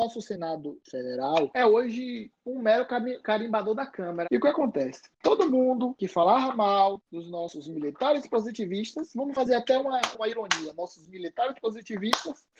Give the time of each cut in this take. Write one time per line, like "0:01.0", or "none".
0:04.2
0:10.1

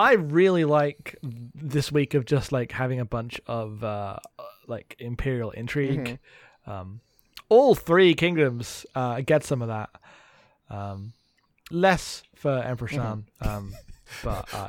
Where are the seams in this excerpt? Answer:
0:11.7

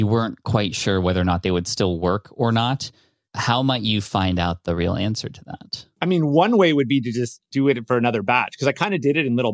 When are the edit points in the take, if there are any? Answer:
none

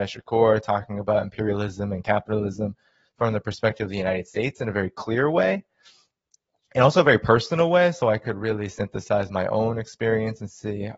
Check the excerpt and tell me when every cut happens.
none

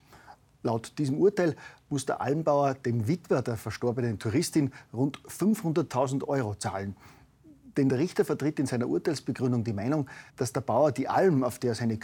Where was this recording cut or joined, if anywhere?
0:10.3

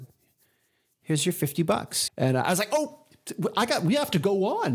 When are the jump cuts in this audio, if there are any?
0:02.1

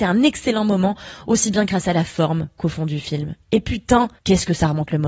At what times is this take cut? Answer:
0:04.2

